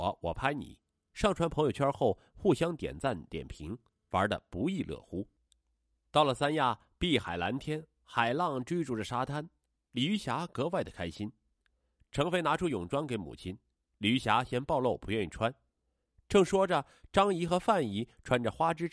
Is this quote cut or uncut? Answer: uncut